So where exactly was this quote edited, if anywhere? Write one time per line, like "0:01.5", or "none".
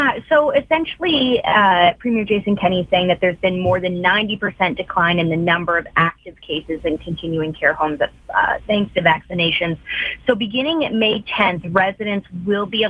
none